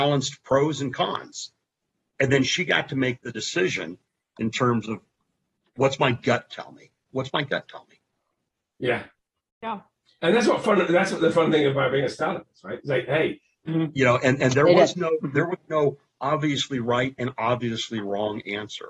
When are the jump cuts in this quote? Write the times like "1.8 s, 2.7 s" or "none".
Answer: 7.1 s, 13.7 s